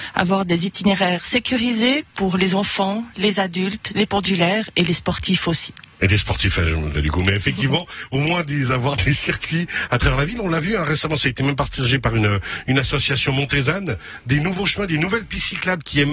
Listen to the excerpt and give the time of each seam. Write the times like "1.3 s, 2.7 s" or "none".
6.9 s